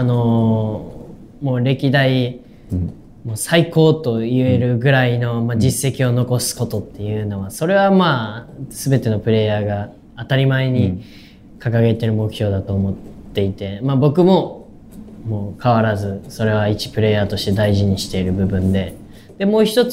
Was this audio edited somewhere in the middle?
no; 0 cuts

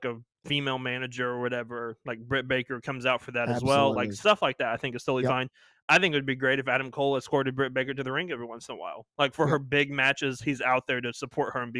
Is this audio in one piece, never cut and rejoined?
yes; 0 cuts

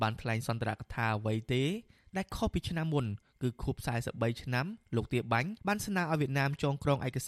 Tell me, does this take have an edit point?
yes; 1 cut; at 5.6 s

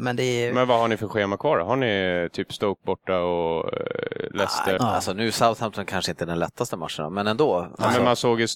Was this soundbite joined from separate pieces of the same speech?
yes; 1 cut; at 4.8 s

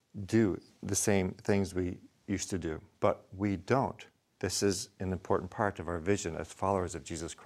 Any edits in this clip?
yes; 1 cut; at 2.9 s

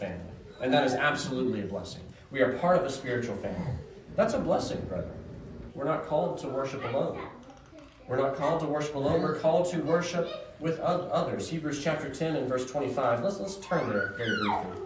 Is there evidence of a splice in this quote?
yes; 2 cuts; at 4.1 s, 5.7 s

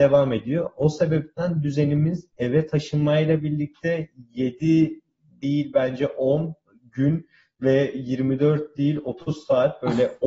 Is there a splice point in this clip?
no; 0 cuts

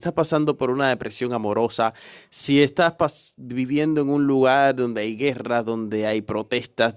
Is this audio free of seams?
yes; 0 cuts

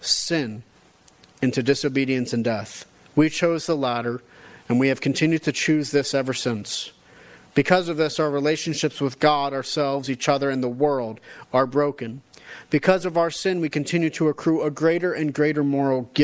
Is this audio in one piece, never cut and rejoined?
yes; 0 cuts

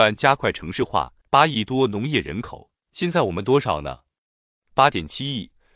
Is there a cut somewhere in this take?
yes; 2 cuts; at 1.2 s, 2.8 s

